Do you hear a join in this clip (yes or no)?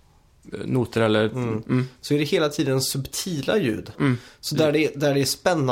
yes